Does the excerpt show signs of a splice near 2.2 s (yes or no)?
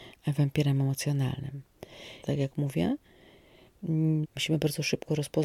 yes